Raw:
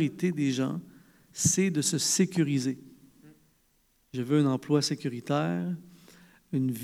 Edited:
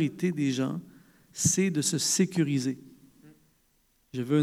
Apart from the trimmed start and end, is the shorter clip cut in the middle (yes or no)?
no